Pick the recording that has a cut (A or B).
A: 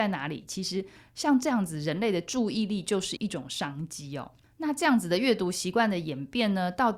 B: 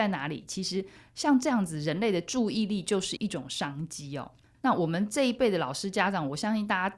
B